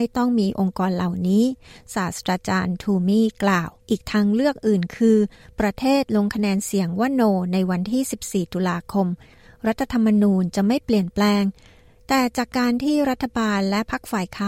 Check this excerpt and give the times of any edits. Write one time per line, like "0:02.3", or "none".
0:03.8